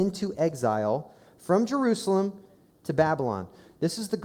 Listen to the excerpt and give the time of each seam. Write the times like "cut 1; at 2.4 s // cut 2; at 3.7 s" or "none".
none